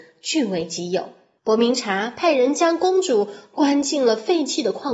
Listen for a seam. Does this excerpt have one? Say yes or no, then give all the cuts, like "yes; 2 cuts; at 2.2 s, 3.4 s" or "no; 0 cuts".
yes; 1 cut; at 1.4 s